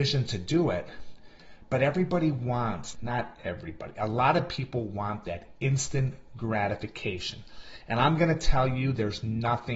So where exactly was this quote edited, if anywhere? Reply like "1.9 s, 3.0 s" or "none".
2.9 s